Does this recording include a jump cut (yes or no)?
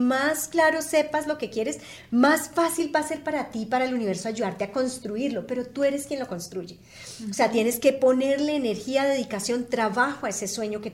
no